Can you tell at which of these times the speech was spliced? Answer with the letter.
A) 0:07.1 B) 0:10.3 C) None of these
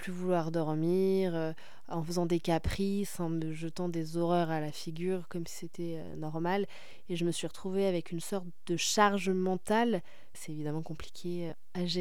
B